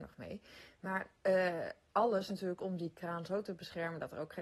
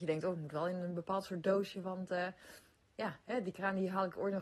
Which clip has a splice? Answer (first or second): first